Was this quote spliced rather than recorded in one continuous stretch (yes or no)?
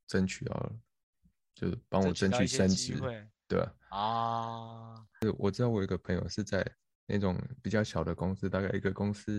no